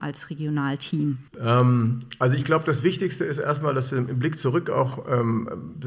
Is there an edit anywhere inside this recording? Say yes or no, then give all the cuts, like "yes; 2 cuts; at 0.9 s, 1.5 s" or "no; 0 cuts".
yes; 1 cut; at 1.3 s